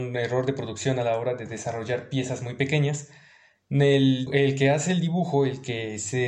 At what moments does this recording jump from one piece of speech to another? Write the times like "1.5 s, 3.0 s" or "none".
4.3 s